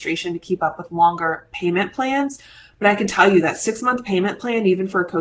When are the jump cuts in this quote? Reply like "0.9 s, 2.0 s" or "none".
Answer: none